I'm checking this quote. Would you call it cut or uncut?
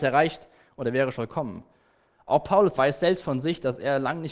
cut